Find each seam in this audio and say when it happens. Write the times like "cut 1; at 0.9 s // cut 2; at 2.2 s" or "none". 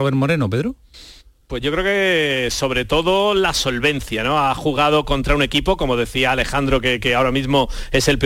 none